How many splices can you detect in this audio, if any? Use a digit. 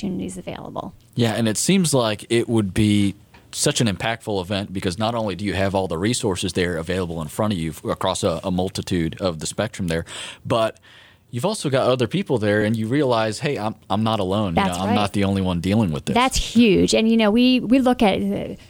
0